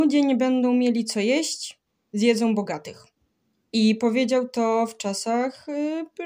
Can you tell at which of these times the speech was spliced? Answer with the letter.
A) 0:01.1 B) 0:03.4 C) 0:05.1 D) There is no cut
D